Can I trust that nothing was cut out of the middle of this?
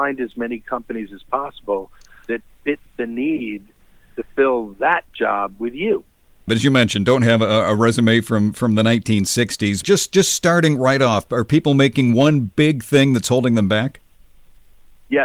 no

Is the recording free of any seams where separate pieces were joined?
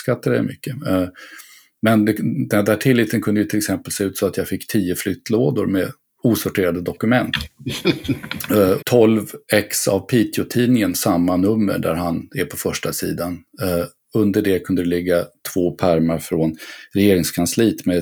no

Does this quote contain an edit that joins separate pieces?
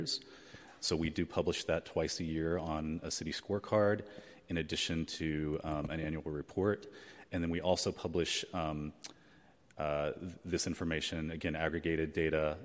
no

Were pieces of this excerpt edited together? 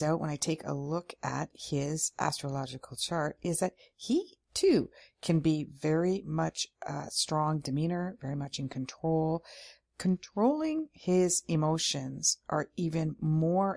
no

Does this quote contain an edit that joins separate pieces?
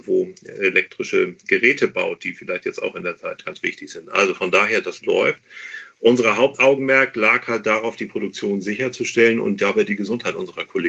no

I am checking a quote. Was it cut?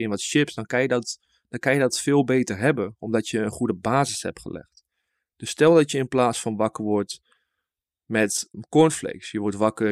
yes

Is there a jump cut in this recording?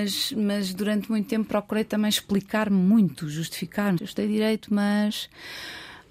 yes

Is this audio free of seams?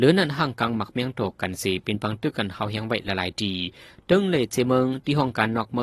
yes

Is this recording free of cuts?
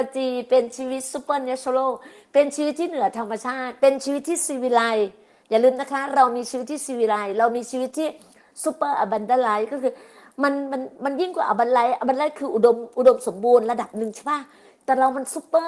yes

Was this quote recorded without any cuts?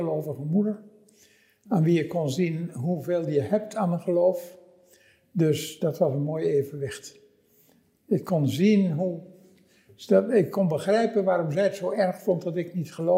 yes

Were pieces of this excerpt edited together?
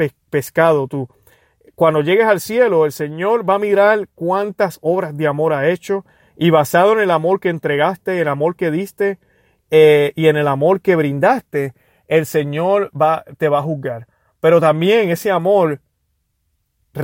no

